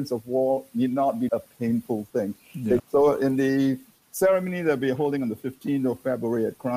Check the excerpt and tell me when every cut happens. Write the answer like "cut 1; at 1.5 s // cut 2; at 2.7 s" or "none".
cut 1; at 1.3 s // cut 2; at 2.8 s